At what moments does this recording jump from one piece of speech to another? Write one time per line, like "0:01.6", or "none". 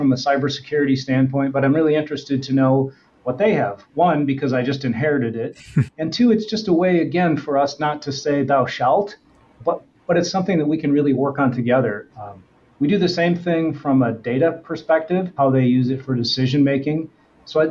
0:12.1
0:15.4